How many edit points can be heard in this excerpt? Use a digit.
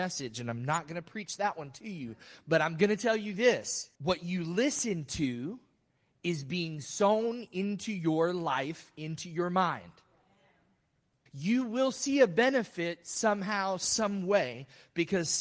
2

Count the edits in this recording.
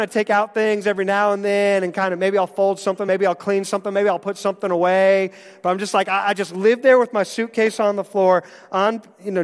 0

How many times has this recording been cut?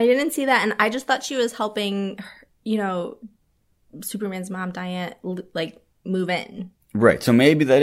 0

